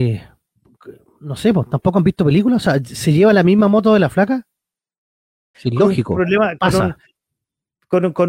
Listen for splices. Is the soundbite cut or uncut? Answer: cut